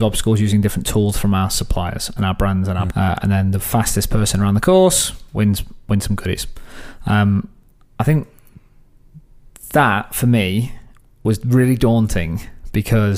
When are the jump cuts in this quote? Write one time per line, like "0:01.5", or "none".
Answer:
0:02.9